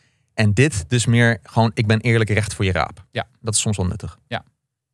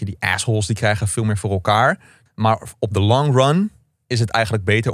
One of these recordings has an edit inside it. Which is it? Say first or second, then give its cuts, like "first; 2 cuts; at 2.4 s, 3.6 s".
second; 1 cut; at 2.3 s